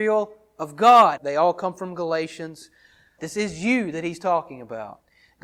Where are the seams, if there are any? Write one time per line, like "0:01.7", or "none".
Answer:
0:01.2
0:03.2

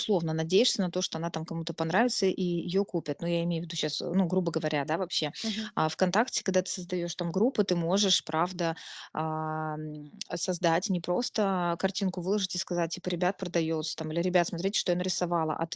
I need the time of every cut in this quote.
none

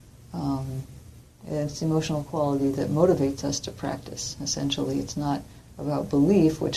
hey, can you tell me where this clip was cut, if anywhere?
none

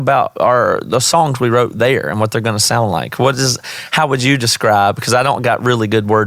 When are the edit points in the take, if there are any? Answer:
none

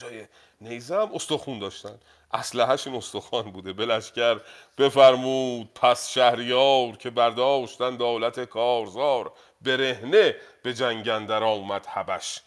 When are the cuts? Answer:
none

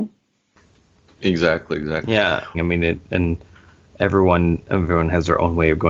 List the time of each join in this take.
0:02.5

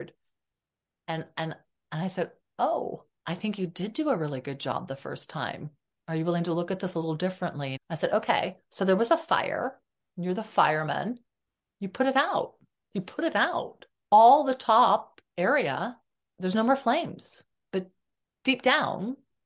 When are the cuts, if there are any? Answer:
0:07.8

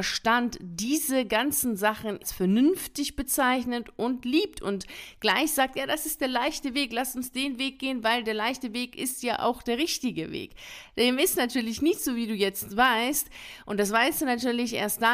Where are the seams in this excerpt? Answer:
none

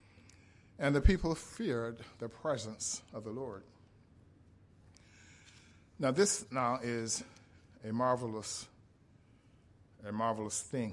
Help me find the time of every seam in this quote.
none

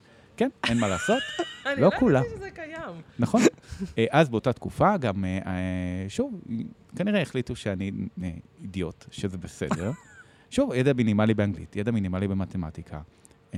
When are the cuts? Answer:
none

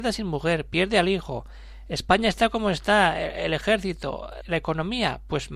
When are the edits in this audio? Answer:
0:04.4

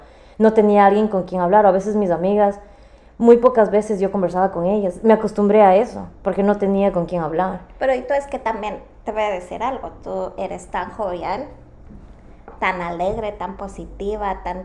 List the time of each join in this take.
none

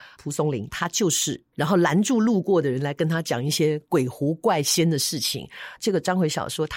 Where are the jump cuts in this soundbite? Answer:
0:01.5
0:05.8

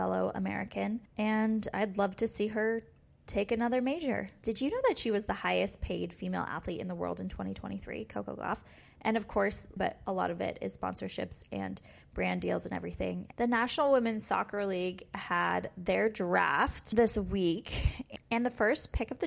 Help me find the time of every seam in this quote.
0:09.8
0:13.3

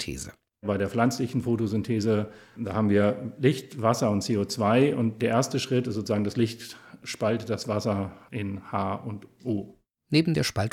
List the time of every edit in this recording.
none

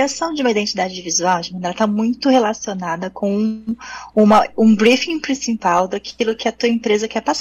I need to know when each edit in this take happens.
none

